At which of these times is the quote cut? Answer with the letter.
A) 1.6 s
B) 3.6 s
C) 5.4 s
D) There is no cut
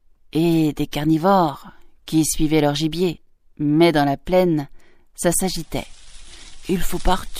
B